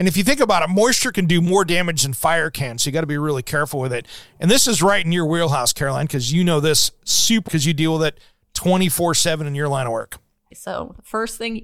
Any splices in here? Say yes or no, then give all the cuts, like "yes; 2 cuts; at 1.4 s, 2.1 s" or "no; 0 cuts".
yes; 2 cuts; at 7.5 s, 10.5 s